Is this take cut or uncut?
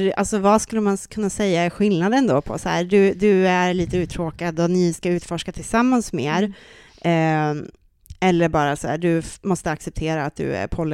uncut